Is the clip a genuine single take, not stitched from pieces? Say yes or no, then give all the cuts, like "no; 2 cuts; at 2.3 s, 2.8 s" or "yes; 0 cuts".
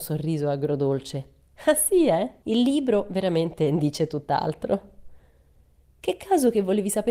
no; 1 cut; at 2.4 s